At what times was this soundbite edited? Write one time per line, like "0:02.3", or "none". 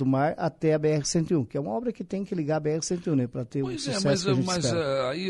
none